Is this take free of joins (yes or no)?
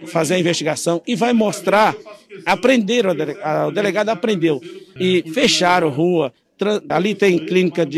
no